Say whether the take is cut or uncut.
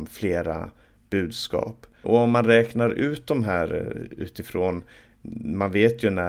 cut